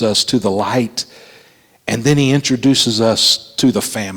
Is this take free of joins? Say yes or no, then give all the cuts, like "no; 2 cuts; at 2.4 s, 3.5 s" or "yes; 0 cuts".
yes; 0 cuts